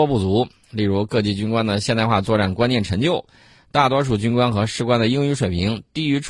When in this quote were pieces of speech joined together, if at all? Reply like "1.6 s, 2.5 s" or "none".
none